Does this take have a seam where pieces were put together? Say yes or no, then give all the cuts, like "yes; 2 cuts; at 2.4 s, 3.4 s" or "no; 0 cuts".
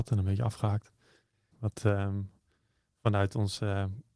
yes; 1 cut; at 1.5 s